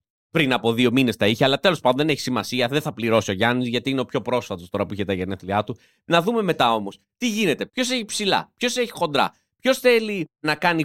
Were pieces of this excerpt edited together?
yes; 1 cut; at 7.7 s

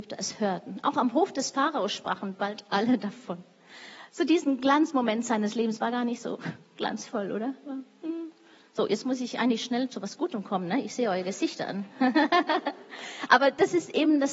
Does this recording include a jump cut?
no; 0 cuts

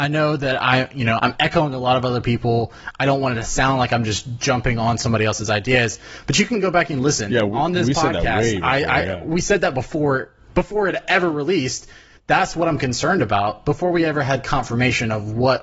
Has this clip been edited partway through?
yes; 1 cut; at 1.2 s

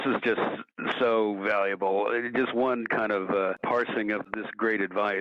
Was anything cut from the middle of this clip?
no; 0 cuts

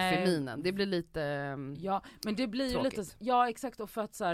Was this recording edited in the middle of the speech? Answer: no; 0 cuts

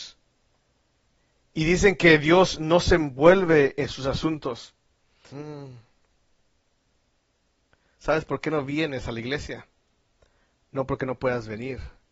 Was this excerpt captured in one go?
no; 1 cut; at 5.3 s

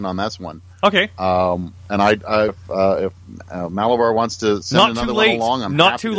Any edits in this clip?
yes; 1 cut; at 2.5 s

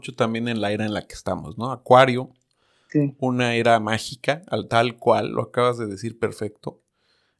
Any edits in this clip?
no; 0 cuts

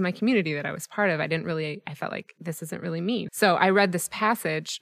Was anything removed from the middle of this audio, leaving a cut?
yes; 1 cut; at 3.3 s

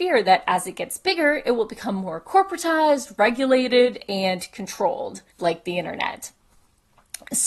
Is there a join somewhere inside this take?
yes; 1 cut; at 5.3 s

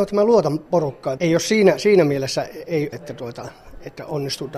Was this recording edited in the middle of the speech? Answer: yes; 2 cuts; at 1.2 s, 2.9 s

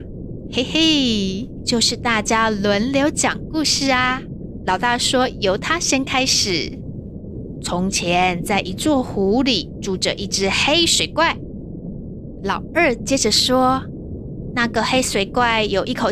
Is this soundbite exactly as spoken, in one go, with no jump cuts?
yes; 0 cuts

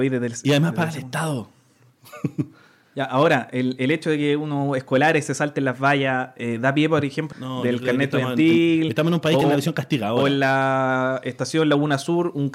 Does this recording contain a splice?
yes; 2 cuts; at 7.3 s, 9.4 s

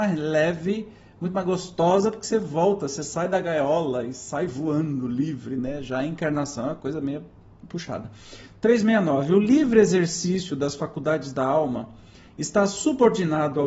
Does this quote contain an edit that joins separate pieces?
no; 0 cuts

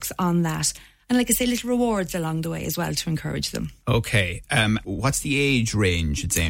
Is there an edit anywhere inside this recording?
yes; 1 cut; at 4.8 s

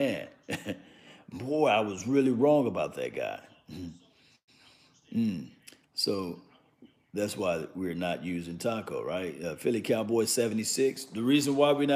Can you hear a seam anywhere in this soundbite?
no; 0 cuts

